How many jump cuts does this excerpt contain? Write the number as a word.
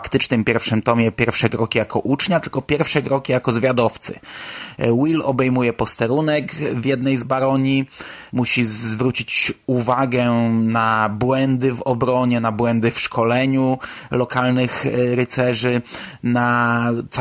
one